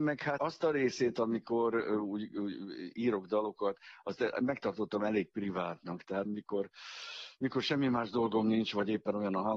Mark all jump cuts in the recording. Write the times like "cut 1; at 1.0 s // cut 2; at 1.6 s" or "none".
cut 1; at 6.3 s

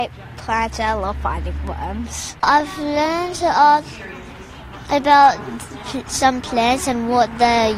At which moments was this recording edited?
cut 1; at 2.4 s

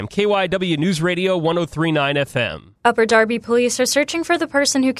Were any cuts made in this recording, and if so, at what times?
cut 1; at 2.8 s

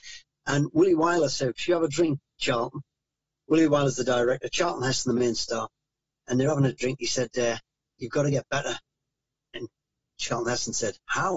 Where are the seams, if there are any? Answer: cut 1; at 7.8 s

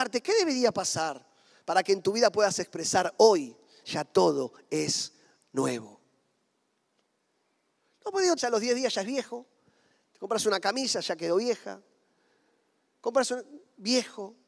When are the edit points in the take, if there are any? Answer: cut 1; at 3.8 s // cut 2; at 8.4 s

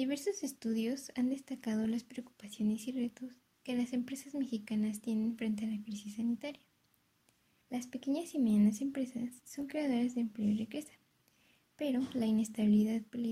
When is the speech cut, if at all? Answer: cut 1; at 7.6 s

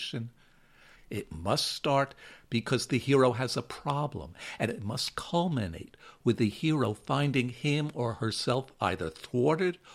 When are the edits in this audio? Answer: cut 1; at 1.0 s

